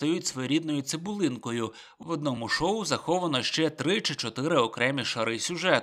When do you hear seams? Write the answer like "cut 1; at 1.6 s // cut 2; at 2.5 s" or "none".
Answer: none

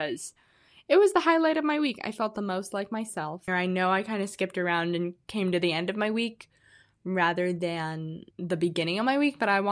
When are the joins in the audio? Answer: cut 1; at 3.5 s // cut 2; at 8.3 s

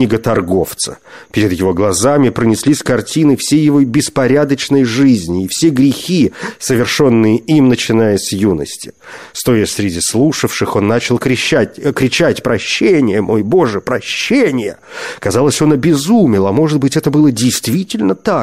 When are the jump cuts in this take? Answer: none

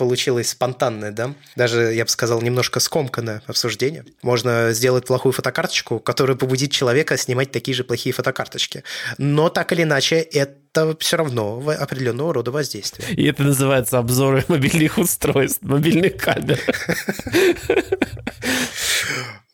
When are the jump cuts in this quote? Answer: cut 1; at 4.2 s

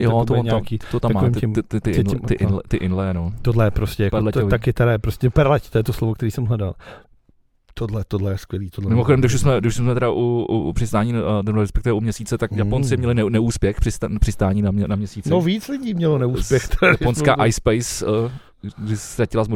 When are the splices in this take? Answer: cut 1; at 12.5 s

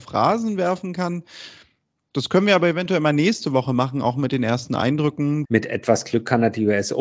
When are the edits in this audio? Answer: cut 1; at 5.5 s

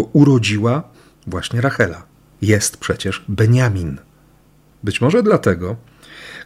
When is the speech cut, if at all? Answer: none

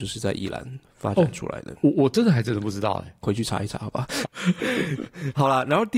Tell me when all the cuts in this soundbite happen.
cut 1; at 3.2 s // cut 2; at 4.2 s

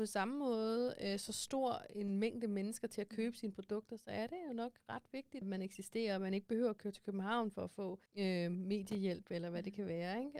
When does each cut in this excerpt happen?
cut 1; at 5.4 s // cut 2; at 8.1 s

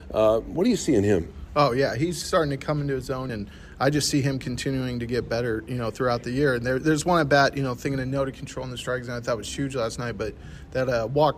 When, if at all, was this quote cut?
cut 1; at 3.3 s

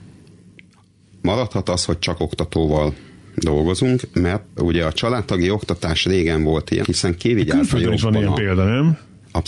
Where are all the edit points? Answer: cut 1; at 4.6 s // cut 2; at 6.8 s

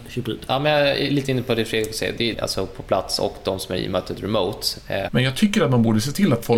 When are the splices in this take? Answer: cut 1; at 2.3 s // cut 2; at 5.1 s

